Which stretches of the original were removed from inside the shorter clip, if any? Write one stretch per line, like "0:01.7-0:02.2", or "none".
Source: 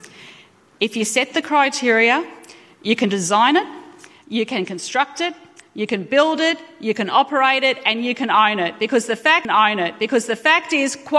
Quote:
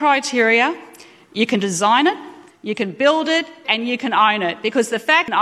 0:04.0-0:05.6
0:06.8-0:07.8